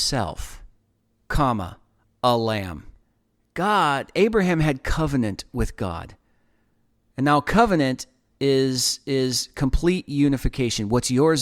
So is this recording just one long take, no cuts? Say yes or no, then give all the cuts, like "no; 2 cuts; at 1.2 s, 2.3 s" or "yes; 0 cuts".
yes; 0 cuts